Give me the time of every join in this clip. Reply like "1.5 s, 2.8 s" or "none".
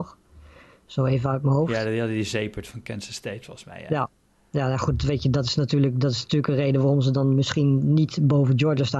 none